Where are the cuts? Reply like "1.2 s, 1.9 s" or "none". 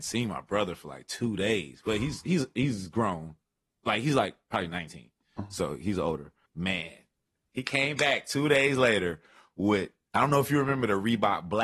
6.5 s